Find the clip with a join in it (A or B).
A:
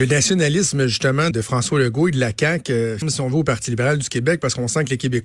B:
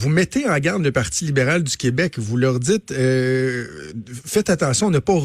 A